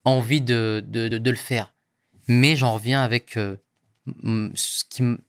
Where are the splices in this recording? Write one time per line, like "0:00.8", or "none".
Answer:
0:01.1